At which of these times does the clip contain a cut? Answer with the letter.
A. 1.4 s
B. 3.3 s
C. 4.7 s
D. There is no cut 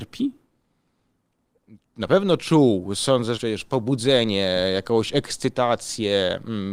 B